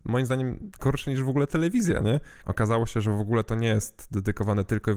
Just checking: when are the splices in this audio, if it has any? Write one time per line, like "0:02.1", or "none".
0:02.4